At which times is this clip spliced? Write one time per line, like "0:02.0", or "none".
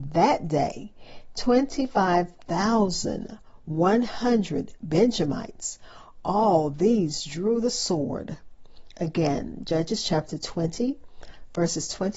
none